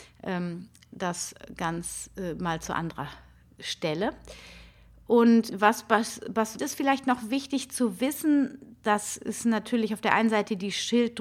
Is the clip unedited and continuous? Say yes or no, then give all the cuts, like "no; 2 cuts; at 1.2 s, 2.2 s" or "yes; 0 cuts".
no; 2 cuts; at 5.5 s, 6.6 s